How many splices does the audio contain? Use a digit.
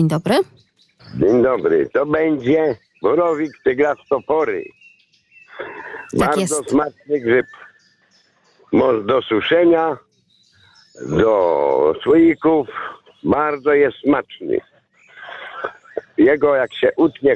0